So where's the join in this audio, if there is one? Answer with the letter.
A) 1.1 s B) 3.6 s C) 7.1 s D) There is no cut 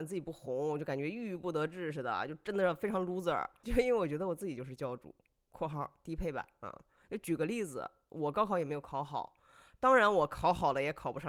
B